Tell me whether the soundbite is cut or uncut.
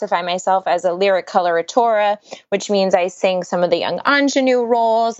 uncut